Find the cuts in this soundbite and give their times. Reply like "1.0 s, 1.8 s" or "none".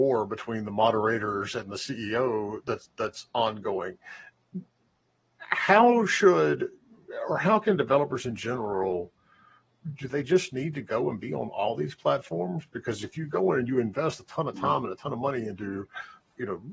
none